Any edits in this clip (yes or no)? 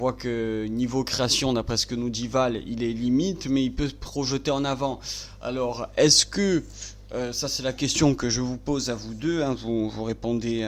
no